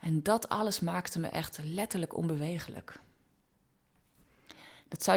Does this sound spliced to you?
no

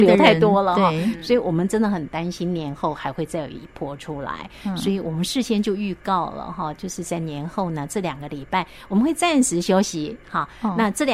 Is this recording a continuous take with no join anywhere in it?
yes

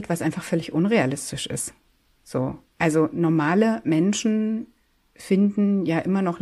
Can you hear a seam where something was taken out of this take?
no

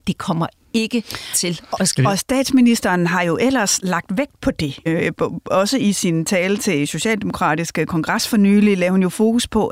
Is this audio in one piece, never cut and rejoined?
no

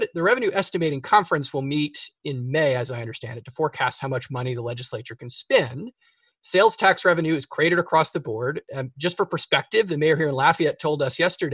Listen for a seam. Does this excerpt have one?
yes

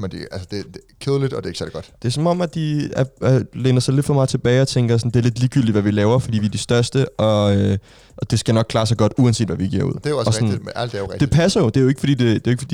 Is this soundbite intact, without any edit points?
yes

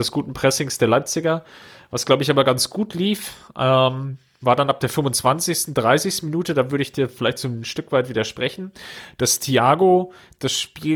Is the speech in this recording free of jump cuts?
yes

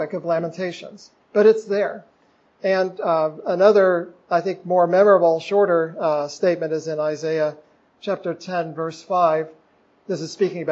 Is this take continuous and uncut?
yes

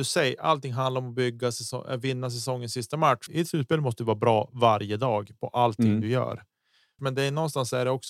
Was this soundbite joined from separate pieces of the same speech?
yes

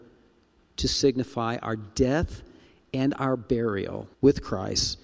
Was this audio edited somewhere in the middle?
yes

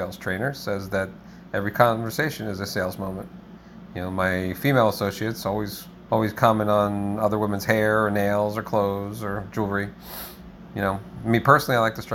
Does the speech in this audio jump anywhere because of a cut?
yes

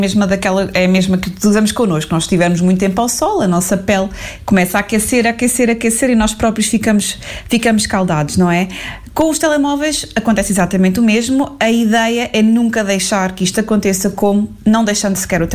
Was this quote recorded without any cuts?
yes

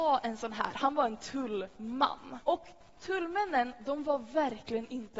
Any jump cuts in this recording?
yes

